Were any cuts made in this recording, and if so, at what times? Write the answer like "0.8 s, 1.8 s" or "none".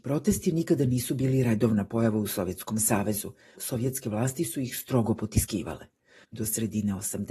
3.6 s, 6.3 s